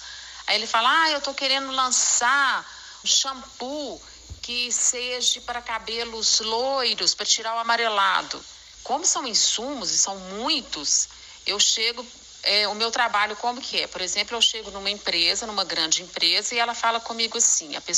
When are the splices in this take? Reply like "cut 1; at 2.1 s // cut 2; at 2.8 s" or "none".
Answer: cut 1; at 3.0 s // cut 2; at 8.7 s